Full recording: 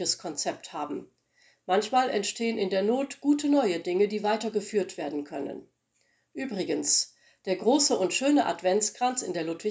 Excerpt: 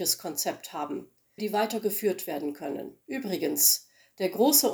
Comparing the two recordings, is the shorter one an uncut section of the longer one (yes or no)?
no